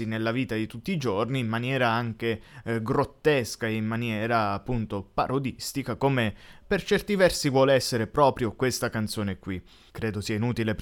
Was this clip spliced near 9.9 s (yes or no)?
yes